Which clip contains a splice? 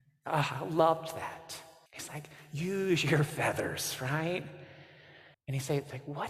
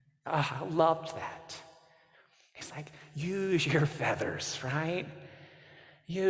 first; 2 cuts; at 1.9 s, 5.3 s

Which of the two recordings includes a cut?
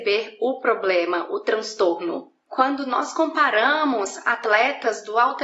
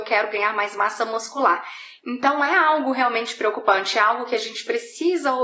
second; 1 cut; at 2.0 s

